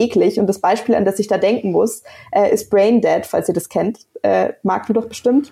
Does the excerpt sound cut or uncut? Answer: uncut